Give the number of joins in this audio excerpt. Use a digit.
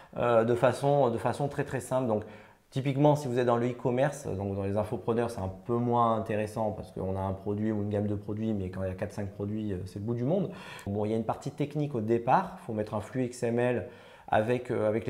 1